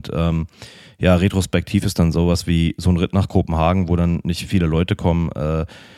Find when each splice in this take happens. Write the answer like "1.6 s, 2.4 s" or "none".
none